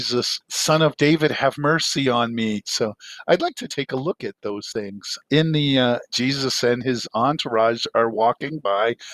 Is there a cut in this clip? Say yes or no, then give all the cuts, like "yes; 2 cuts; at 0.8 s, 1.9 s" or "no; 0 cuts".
yes; 3 cuts; at 2.6 s, 3.7 s, 6.1 s